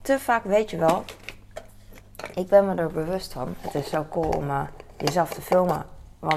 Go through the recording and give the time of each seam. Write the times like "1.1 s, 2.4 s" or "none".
none